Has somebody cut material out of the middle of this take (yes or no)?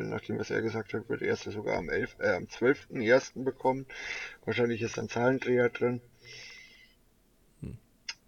no